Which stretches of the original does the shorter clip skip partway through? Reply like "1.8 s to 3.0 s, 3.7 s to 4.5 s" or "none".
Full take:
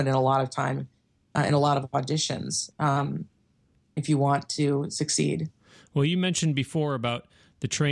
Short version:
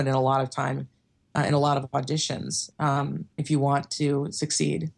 3.3 s to 3.9 s